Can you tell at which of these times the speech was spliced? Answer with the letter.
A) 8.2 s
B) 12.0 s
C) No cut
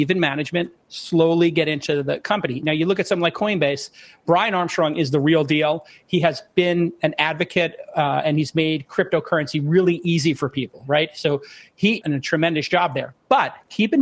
B